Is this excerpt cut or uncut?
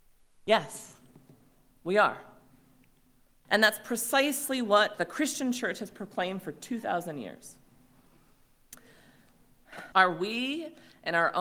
cut